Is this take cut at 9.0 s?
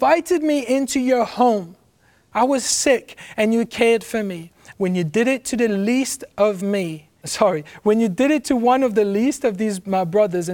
no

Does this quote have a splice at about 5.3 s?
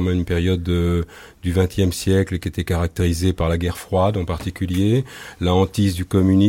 no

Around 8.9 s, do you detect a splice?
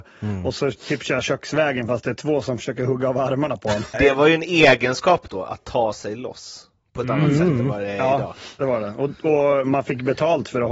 no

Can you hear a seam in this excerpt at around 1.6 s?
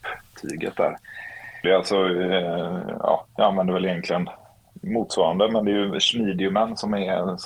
yes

